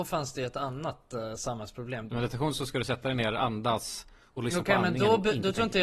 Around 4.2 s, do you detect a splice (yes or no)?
no